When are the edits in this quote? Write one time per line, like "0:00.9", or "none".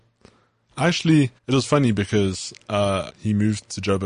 0:01.4
0:03.1